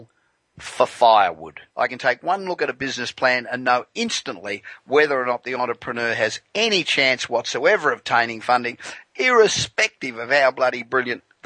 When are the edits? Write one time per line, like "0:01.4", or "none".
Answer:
0:01.7